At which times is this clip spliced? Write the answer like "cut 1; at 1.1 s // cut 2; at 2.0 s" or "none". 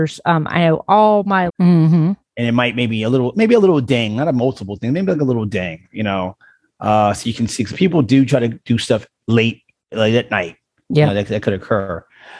cut 1; at 1.5 s